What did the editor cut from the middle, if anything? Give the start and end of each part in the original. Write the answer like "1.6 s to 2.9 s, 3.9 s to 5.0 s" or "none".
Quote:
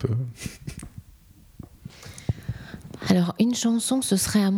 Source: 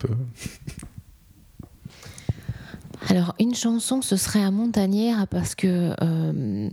none